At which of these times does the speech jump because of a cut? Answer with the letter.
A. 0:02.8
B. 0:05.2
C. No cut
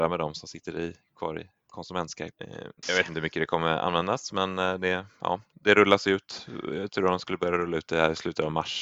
A